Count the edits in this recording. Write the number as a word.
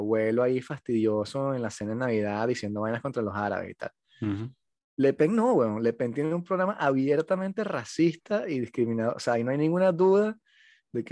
zero